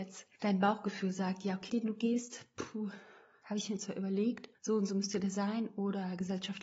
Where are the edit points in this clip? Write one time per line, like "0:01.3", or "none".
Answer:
0:01.7